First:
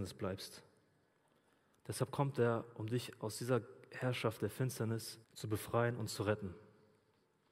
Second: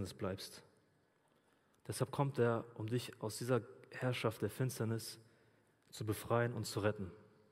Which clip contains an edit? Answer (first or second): first